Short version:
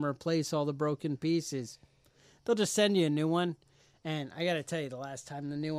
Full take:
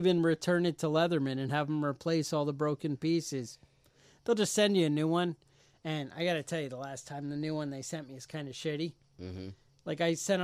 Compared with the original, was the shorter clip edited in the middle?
no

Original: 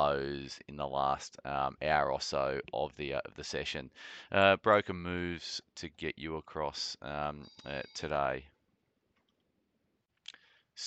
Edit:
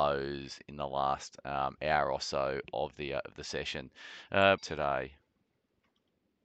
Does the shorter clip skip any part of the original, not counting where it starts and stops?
yes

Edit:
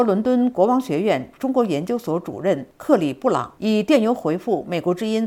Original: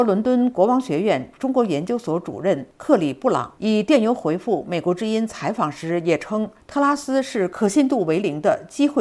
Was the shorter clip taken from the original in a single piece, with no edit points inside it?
yes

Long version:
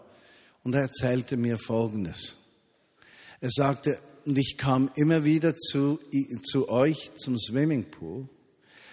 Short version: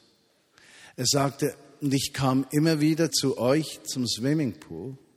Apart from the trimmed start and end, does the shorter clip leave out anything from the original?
yes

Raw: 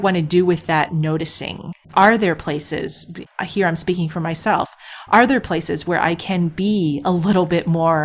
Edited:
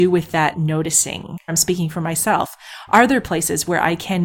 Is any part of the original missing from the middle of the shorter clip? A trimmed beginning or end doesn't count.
yes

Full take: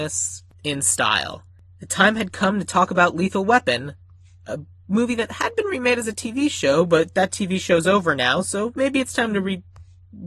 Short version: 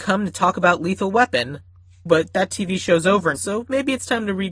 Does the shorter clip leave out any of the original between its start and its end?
yes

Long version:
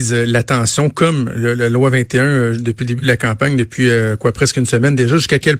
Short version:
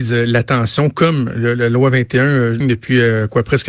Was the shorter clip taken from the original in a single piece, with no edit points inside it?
no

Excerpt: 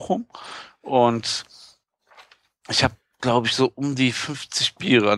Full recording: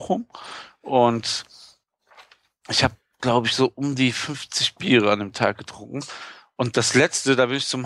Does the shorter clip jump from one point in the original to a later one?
no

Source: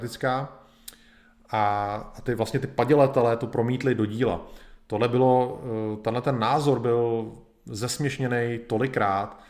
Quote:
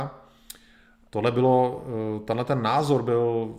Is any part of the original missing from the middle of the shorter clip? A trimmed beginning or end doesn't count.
yes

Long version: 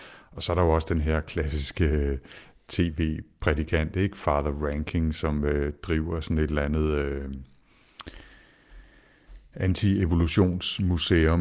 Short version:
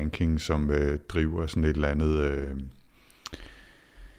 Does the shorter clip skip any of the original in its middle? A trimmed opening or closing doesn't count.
no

